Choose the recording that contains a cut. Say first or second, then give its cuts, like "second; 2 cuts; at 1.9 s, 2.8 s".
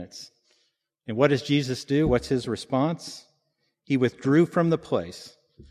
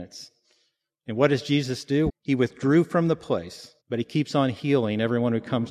second; 2 cuts; at 2.1 s, 3.8 s